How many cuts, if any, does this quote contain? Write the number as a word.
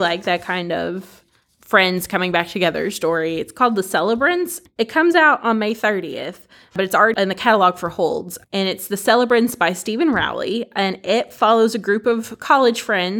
zero